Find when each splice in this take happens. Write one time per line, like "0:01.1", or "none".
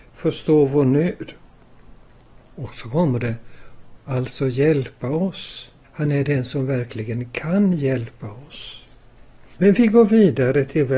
0:04.0
0:05.8